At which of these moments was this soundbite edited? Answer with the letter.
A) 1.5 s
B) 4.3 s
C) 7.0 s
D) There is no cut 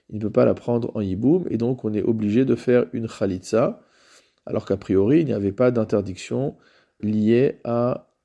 C